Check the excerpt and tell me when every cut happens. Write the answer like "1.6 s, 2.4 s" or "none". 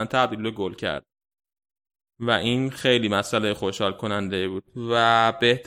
none